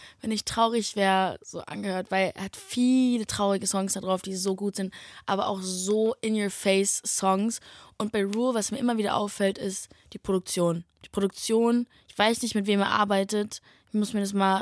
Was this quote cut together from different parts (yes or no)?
no